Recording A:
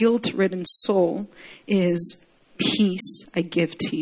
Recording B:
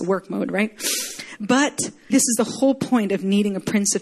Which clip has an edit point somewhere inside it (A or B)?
B